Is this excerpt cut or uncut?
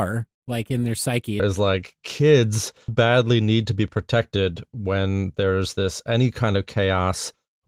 cut